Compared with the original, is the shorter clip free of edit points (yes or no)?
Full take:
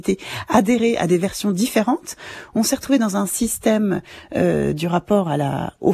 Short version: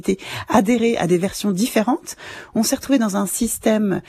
yes